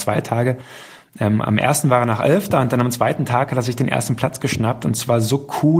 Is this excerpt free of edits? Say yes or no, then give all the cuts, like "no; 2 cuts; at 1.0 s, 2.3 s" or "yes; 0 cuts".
yes; 0 cuts